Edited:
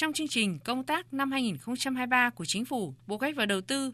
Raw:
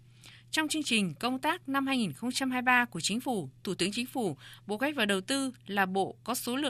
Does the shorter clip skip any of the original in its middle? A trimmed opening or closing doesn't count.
yes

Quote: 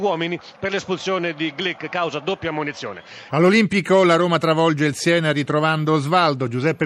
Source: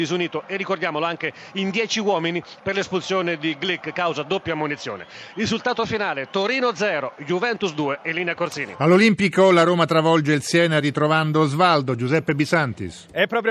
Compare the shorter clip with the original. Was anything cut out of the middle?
yes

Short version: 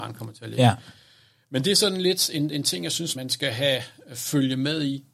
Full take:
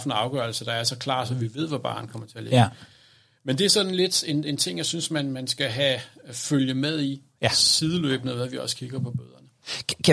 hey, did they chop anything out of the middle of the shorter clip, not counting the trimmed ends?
yes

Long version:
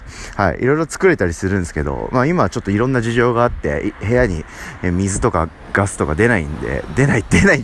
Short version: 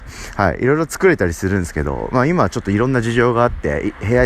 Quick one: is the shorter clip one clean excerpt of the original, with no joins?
yes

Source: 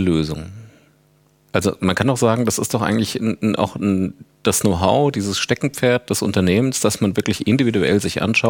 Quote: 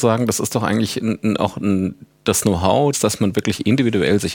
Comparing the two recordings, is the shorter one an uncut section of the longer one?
no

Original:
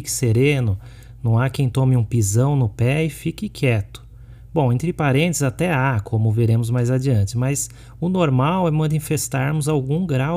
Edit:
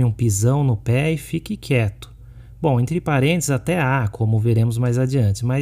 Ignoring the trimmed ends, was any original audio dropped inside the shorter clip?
no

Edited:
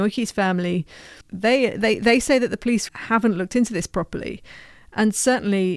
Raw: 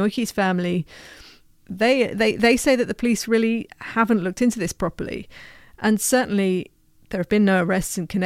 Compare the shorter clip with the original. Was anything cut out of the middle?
yes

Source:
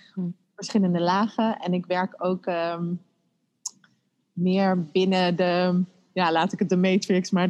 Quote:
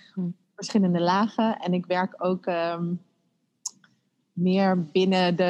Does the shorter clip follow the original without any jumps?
yes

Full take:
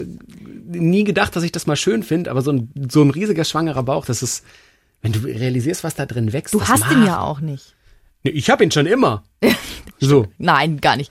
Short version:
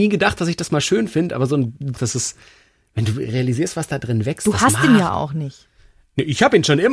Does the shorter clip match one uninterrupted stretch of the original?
no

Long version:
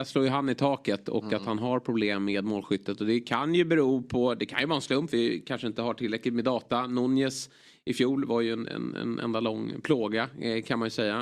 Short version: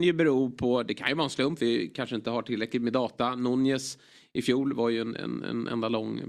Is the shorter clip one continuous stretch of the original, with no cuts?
yes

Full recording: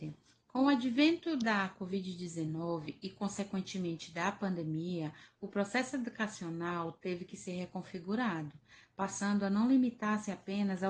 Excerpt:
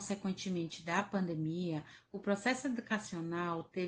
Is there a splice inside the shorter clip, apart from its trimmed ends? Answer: no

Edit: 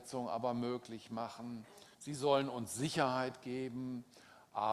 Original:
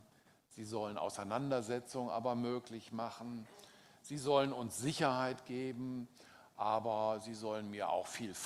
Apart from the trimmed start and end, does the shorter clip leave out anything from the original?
yes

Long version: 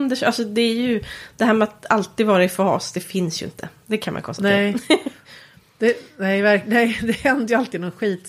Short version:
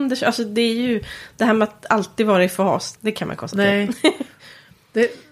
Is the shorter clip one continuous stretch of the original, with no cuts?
no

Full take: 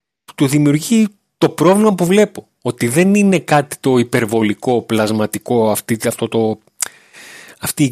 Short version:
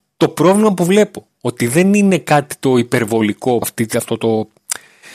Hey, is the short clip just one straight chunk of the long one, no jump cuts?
no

